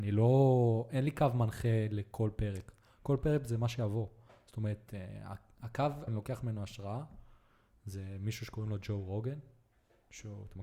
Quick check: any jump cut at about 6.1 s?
yes; 1 cut; at 6.1 s

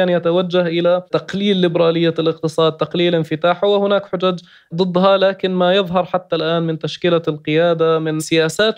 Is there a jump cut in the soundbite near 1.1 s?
yes; 1 cut; at 1.1 s

